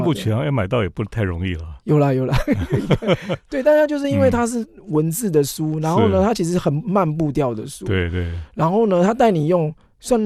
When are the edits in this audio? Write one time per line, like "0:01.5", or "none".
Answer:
none